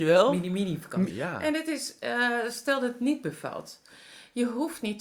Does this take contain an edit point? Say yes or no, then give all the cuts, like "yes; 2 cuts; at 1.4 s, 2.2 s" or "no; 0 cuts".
yes; 1 cut; at 1.1 s